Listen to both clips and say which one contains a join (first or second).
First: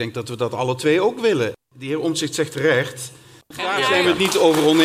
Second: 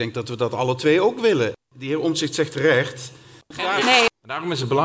second